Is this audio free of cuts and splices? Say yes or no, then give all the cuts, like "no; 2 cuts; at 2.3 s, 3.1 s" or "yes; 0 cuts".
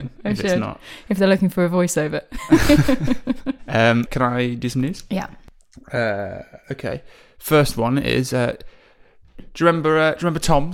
no; 1 cut; at 4.1 s